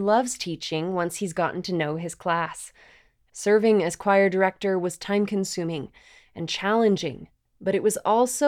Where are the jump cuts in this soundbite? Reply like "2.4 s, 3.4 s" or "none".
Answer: 3.3 s